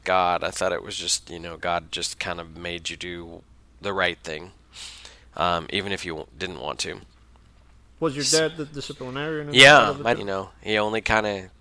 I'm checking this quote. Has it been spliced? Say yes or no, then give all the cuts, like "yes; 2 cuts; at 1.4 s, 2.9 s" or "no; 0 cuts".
yes; 1 cut; at 10.1 s